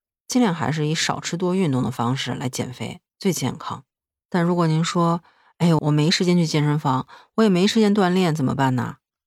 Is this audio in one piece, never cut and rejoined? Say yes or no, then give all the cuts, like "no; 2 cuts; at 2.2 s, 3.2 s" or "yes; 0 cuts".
no; 1 cut; at 5.8 s